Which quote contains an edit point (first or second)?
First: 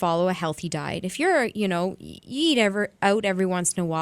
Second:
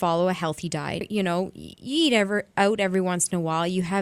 second